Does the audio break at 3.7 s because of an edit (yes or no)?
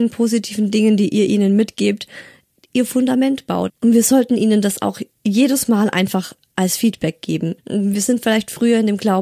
yes